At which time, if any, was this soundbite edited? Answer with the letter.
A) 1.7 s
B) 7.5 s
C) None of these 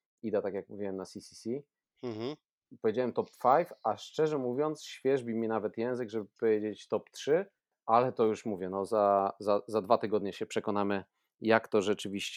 C